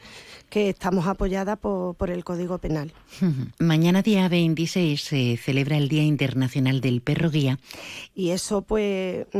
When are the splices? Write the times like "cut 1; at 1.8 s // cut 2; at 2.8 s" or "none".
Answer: cut 1; at 3.5 s // cut 2; at 8.1 s